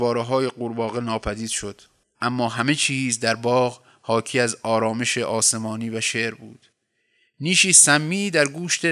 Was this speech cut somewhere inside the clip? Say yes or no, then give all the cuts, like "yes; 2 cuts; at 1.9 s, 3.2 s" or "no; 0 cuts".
no; 0 cuts